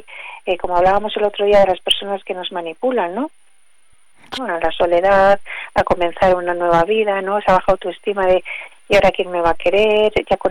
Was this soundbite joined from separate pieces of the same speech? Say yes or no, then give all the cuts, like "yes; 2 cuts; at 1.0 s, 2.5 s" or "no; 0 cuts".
yes; 1 cut; at 4.4 s